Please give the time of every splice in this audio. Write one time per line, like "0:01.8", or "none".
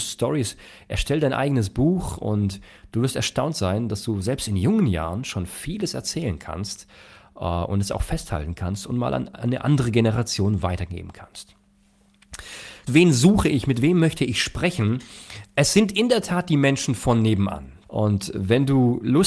0:12.9
0:17.8